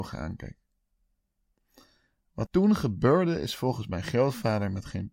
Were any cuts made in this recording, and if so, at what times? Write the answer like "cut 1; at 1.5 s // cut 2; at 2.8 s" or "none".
cut 1; at 2.5 s